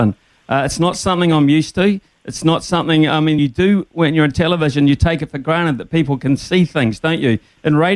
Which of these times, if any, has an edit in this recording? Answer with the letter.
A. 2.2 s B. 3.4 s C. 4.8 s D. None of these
D